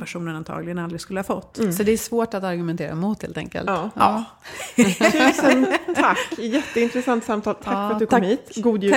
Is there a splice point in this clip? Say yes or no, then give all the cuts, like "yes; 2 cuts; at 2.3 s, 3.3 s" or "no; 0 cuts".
no; 0 cuts